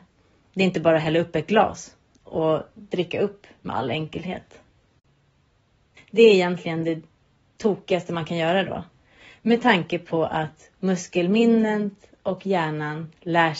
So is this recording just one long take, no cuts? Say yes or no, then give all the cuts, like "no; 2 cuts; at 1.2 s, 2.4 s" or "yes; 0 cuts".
no; 1 cut; at 6.0 s